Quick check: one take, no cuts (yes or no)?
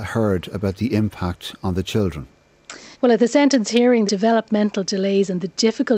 no